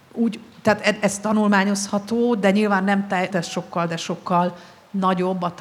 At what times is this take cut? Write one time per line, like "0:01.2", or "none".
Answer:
0:03.3